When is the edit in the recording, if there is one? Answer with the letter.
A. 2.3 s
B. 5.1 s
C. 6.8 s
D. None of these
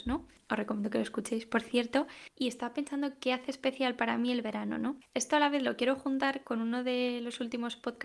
A